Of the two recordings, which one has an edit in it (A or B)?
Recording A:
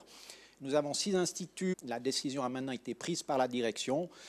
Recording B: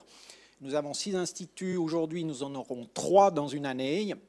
A